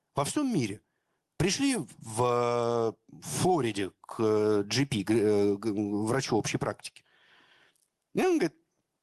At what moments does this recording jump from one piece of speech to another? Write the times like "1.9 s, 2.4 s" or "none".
none